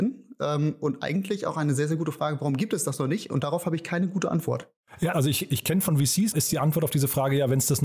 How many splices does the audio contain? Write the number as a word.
two